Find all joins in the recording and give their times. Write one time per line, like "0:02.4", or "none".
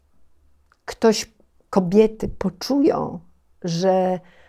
none